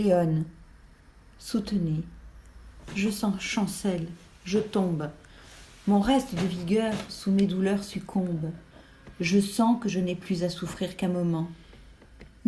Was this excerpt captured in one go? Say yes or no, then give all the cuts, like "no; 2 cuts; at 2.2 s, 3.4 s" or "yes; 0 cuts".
yes; 0 cuts